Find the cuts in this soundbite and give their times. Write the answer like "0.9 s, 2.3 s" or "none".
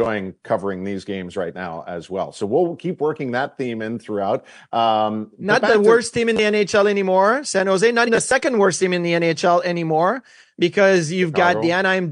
8.1 s